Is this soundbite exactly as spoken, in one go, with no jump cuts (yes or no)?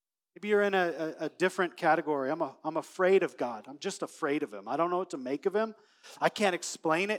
yes